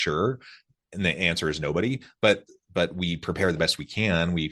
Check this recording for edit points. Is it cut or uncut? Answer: uncut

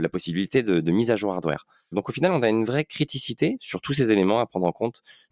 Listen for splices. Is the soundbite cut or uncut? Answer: uncut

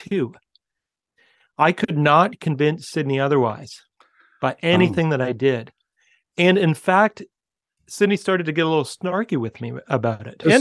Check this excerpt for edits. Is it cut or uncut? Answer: uncut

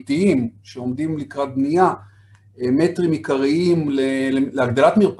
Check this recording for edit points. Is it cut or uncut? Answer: uncut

